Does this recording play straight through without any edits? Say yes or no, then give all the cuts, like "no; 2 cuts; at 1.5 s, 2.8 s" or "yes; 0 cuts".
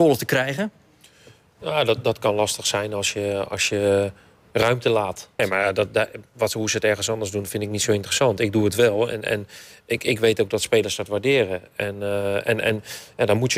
no; 1 cut; at 5.4 s